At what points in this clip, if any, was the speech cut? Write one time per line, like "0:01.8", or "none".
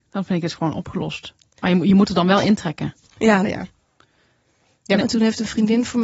0:03.4
0:05.0